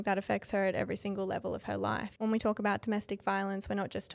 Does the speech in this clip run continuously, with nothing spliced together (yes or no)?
no